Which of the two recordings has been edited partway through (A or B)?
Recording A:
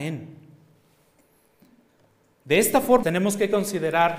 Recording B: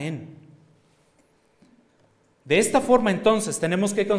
A